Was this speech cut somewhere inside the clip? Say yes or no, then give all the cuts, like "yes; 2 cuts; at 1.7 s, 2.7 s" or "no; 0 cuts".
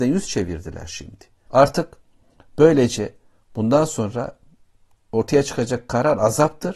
yes; 1 cut; at 1.5 s